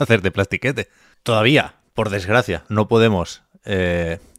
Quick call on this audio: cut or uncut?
cut